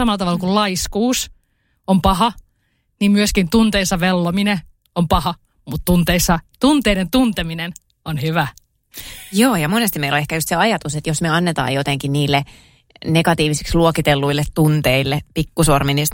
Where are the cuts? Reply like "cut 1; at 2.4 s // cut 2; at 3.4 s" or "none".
none